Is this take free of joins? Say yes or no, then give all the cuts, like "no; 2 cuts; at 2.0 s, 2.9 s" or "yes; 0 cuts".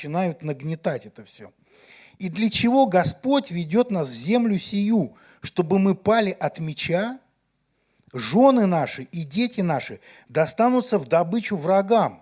yes; 0 cuts